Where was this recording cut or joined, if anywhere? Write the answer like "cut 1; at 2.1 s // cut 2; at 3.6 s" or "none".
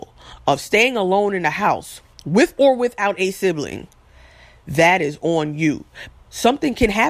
cut 1; at 6.1 s